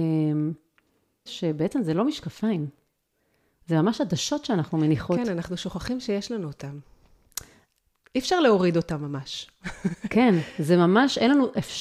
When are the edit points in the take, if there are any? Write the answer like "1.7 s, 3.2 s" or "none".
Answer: 1.3 s